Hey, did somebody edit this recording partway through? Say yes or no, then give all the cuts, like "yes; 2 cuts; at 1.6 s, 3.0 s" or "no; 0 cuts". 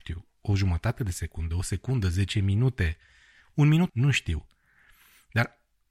yes; 1 cut; at 3.9 s